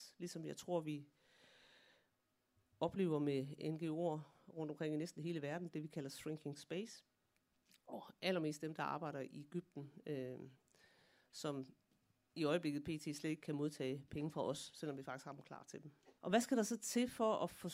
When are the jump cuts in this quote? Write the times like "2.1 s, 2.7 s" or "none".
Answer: none